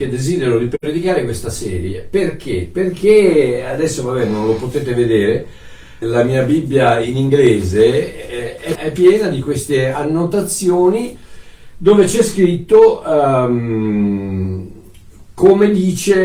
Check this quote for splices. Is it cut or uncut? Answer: cut